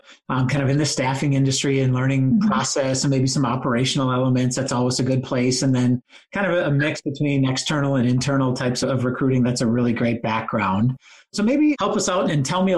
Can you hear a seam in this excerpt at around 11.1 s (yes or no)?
no